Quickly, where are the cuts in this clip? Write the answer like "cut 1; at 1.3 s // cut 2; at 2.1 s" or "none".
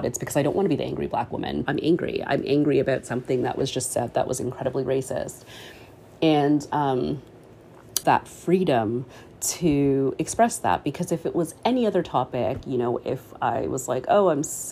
cut 1; at 1.7 s // cut 2; at 8.0 s